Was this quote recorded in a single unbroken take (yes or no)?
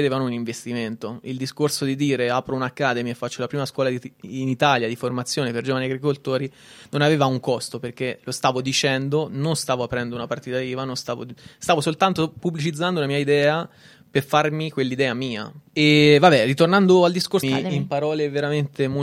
no